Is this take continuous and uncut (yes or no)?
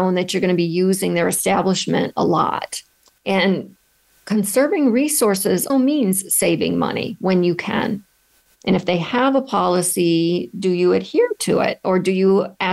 no